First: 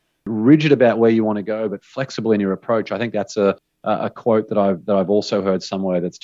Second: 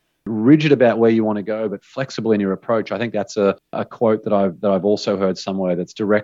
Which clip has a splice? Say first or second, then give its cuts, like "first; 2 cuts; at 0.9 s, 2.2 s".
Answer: second; 1 cut; at 3.7 s